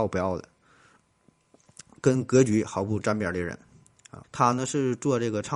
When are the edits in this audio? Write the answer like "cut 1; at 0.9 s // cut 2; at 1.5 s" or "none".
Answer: cut 1; at 4.2 s